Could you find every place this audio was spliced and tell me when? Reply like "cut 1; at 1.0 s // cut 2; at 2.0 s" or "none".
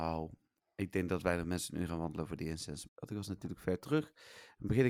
cut 1; at 2.9 s